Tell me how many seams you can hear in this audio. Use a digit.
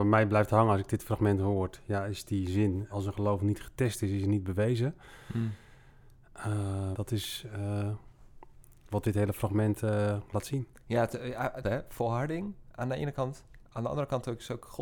3